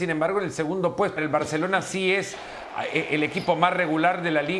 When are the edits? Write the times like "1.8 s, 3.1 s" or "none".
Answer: 1.2 s